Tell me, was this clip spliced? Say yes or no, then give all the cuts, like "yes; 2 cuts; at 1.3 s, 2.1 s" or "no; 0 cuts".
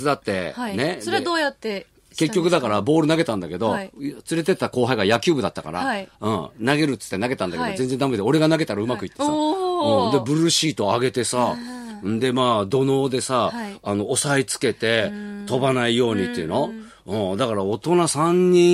no; 0 cuts